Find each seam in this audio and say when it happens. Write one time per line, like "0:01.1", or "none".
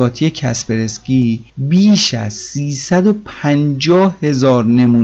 0:01.5